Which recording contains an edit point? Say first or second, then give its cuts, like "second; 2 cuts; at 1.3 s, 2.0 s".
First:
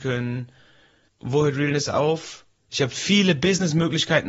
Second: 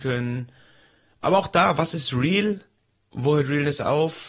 first; 2 cuts; at 1.1 s, 2.6 s